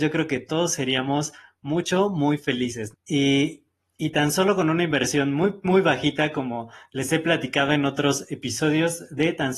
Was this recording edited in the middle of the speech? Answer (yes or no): yes